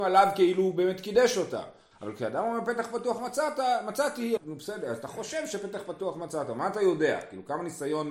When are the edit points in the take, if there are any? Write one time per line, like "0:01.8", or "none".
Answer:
0:01.9
0:04.4